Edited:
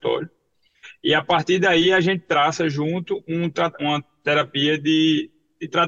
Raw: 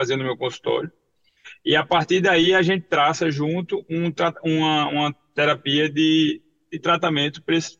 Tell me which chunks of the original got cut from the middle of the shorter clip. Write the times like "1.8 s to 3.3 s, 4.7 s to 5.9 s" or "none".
4.4 s to 4.9 s